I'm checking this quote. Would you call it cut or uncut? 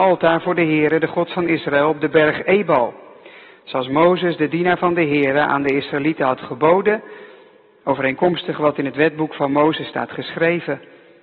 uncut